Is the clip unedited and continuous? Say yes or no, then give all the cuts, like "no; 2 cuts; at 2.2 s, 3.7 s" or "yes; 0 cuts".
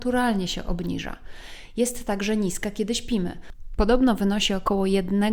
yes; 0 cuts